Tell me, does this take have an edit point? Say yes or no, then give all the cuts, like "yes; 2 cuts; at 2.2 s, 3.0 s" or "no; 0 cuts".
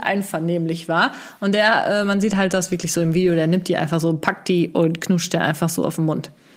no; 0 cuts